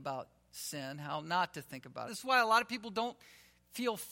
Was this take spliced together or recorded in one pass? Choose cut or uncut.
cut